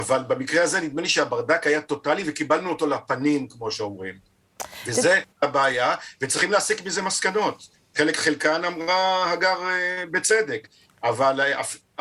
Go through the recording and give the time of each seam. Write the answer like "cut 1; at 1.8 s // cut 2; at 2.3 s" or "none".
cut 1; at 5.3 s